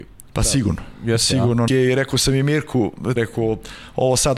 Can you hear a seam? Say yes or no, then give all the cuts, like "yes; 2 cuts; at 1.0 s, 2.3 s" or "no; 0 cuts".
yes; 2 cuts; at 1.7 s, 3.2 s